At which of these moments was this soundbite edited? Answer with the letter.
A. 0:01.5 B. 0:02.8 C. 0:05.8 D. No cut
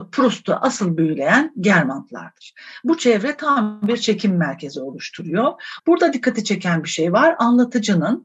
C